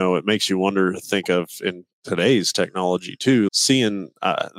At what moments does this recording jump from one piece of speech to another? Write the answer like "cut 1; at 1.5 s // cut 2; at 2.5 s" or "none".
cut 1; at 3.5 s